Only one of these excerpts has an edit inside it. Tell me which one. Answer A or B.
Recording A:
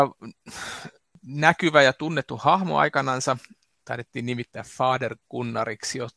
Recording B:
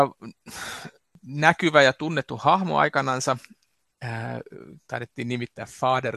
A